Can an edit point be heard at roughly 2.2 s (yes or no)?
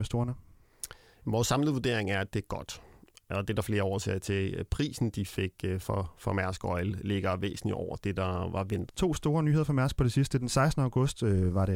no